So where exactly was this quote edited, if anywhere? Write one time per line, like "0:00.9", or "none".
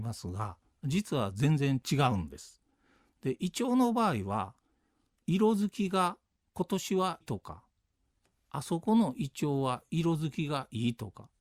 0:07.2